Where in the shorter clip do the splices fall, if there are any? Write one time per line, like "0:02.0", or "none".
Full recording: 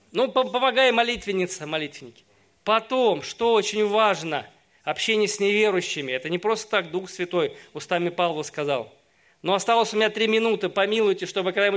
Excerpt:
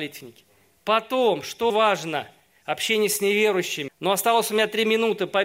0:01.7
0:03.9